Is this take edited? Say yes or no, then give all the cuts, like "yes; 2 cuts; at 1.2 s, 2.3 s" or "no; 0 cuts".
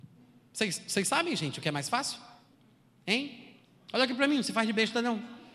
no; 0 cuts